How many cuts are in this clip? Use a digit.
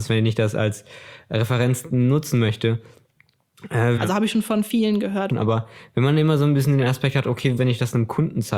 3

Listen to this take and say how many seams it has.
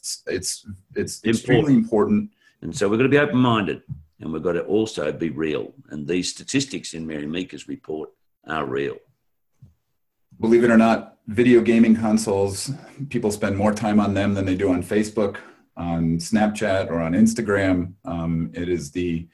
1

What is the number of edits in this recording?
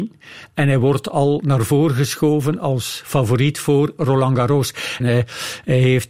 1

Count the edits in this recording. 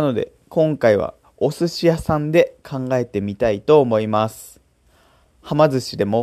0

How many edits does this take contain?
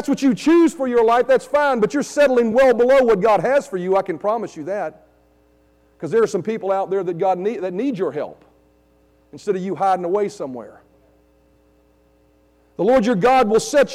0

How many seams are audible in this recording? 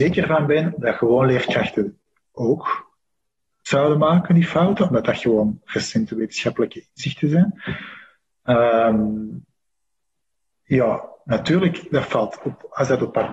0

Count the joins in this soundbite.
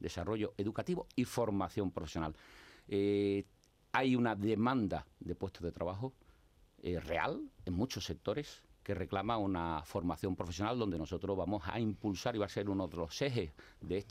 0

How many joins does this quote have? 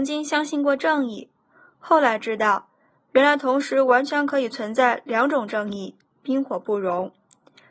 1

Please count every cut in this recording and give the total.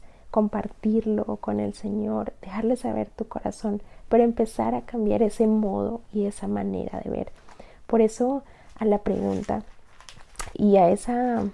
1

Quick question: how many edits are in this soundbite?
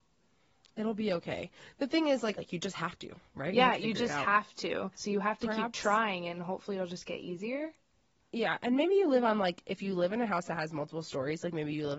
2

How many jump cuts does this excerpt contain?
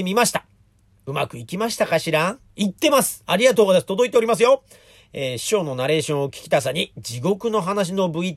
0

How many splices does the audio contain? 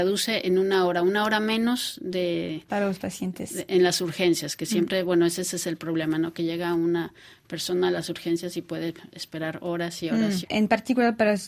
1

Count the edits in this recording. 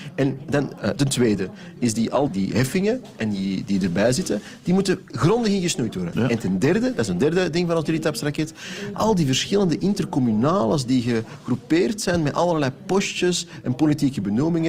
3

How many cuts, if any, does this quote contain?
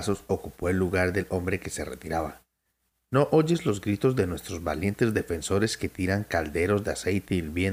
1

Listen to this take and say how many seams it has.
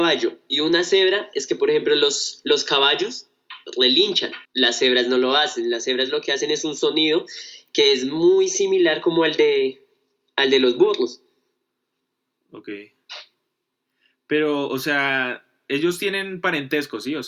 1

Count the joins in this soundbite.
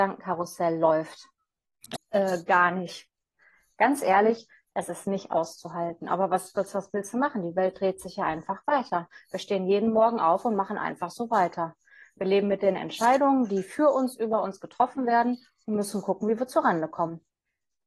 1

